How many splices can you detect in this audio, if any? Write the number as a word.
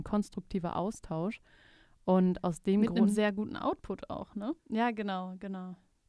one